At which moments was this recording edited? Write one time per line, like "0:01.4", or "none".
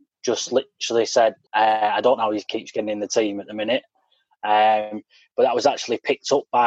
0:01.5